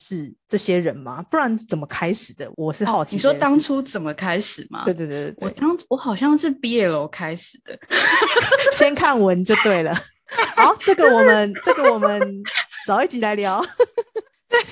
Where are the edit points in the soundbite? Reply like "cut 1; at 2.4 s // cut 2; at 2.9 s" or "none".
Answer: none